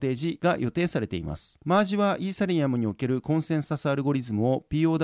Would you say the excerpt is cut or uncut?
cut